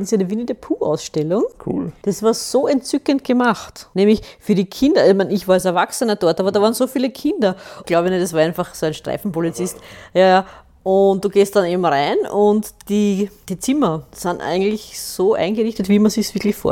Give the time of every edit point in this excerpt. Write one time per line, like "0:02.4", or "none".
0:07.8

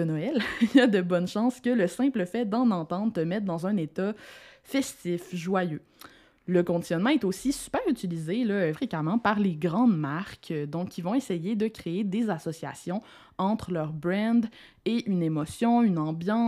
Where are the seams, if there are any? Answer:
0:08.7

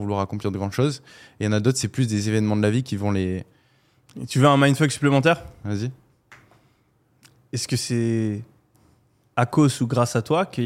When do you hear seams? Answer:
none

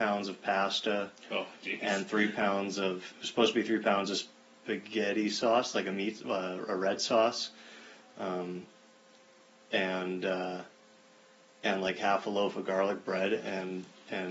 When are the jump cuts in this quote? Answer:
none

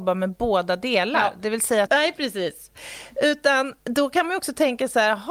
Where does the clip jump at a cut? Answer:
0:01.9
0:03.8

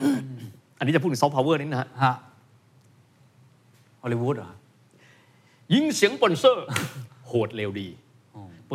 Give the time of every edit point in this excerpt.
none

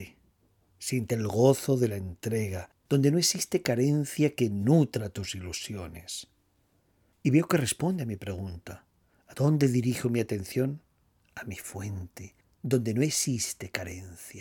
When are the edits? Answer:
0:12.4

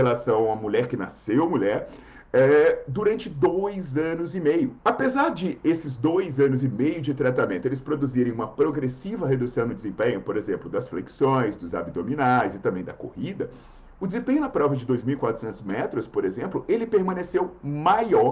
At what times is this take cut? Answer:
0:04.8

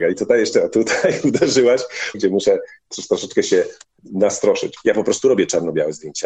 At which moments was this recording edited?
0:02.1
0:04.8

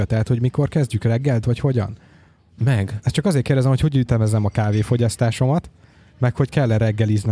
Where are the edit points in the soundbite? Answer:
0:01.4

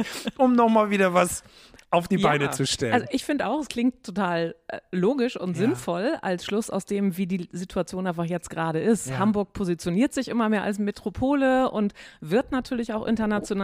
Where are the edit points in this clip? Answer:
none

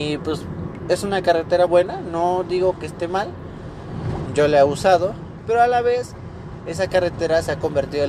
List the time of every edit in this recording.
0:01.7
0:04.3

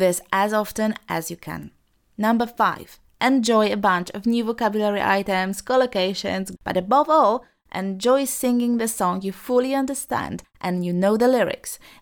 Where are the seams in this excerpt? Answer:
0:06.6

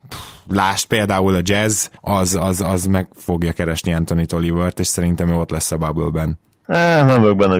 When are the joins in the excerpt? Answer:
0:02.0

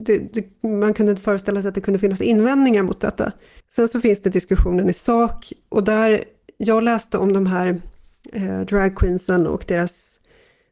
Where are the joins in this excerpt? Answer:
0:03.6

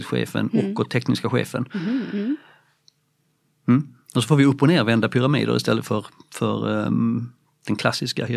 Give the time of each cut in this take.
none

